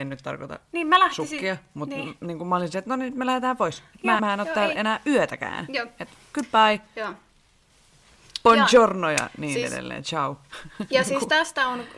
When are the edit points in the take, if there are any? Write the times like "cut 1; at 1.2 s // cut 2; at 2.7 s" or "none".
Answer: cut 1; at 4.2 s